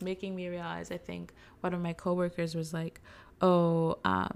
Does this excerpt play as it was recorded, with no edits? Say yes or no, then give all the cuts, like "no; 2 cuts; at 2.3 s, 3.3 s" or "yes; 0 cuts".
yes; 0 cuts